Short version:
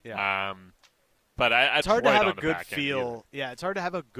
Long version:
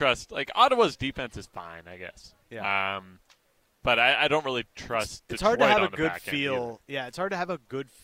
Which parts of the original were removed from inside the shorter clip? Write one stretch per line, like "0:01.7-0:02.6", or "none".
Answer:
0:04.3-0:05.4